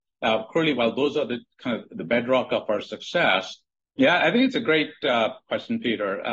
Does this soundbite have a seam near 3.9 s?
yes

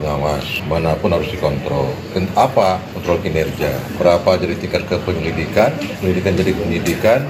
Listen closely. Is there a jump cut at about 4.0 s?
yes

